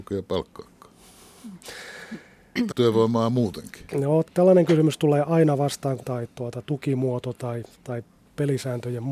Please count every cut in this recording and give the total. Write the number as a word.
three